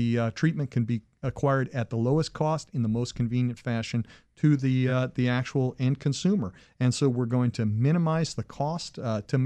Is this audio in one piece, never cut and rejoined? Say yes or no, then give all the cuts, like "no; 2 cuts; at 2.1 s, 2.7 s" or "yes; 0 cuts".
yes; 0 cuts